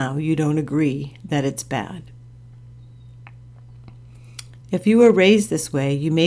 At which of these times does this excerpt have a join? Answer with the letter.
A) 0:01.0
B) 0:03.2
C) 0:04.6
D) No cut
C